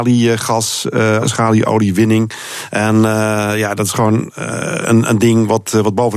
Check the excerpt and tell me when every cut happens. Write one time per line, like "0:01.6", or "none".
0:01.2